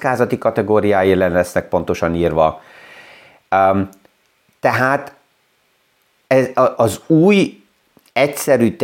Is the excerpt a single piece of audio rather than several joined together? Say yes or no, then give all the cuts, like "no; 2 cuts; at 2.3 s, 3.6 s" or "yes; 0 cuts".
yes; 0 cuts